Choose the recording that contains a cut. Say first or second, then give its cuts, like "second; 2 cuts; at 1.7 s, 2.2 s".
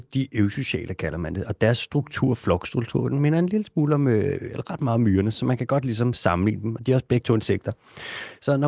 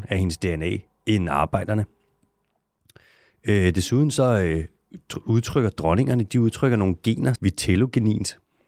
second; 1 cut; at 7.4 s